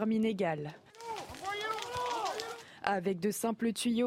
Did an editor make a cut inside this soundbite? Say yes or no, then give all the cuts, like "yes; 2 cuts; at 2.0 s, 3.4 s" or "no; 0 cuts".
no; 0 cuts